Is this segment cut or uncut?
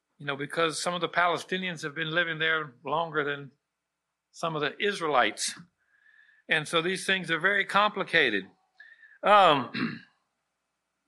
uncut